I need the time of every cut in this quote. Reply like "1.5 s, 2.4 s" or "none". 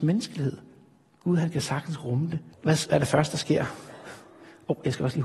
2.5 s

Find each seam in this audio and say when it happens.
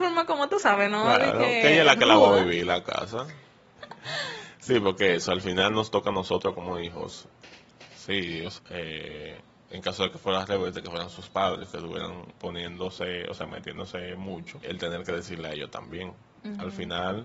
3.8 s, 8.6 s, 14.6 s

